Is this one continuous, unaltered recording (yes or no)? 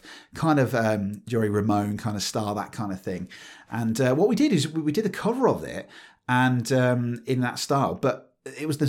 yes